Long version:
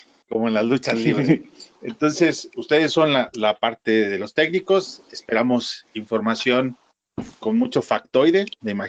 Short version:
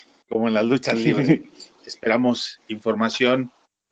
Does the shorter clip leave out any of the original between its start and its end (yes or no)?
yes